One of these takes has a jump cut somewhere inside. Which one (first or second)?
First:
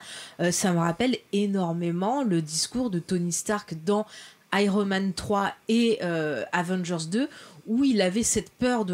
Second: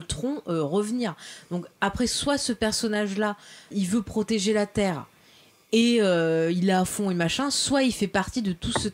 second